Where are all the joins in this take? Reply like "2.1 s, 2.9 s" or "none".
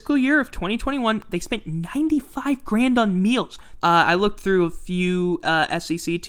3.8 s